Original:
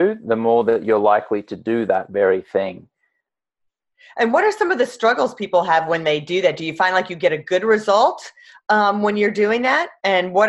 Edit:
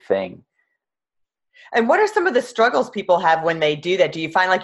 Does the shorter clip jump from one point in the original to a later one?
no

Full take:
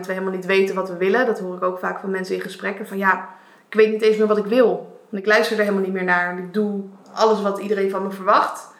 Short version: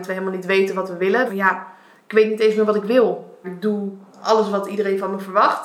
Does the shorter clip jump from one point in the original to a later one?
yes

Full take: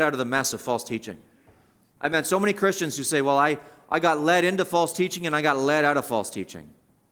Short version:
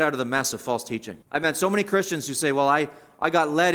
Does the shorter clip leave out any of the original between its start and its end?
yes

